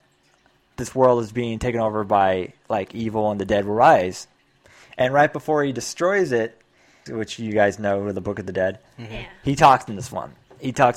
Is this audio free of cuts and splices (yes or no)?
no